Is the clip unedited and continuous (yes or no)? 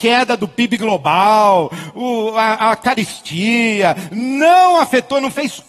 yes